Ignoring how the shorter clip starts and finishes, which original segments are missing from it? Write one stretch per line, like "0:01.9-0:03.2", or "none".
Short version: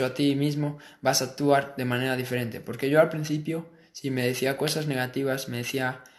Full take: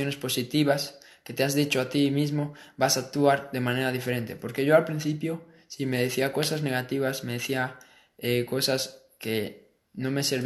none